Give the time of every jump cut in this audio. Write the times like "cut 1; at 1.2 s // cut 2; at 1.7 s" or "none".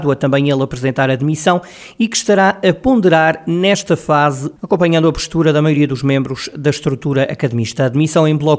cut 1; at 4.6 s